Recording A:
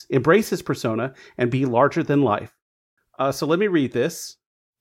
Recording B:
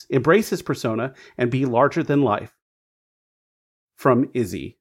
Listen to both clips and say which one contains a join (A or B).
A